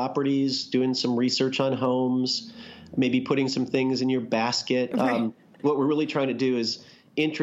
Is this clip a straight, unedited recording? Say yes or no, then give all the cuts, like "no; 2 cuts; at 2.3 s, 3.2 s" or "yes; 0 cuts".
no; 1 cut; at 4.9 s